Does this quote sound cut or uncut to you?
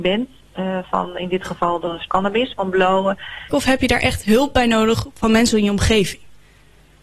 cut